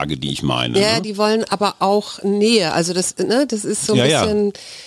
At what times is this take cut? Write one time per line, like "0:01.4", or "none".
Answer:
none